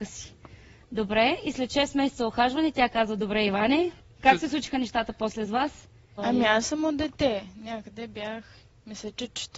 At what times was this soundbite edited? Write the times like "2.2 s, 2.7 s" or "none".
4.2 s, 6.2 s